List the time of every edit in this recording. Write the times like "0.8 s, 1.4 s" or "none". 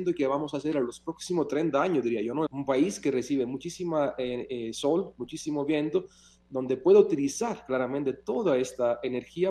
2.5 s